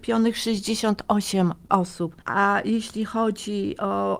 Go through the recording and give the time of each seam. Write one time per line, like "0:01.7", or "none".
0:02.2